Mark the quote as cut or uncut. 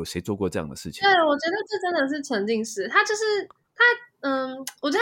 uncut